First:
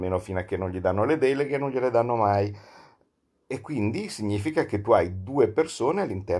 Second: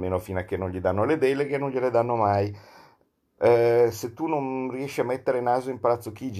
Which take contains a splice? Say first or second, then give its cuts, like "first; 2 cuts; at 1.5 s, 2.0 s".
second; 1 cut; at 3.4 s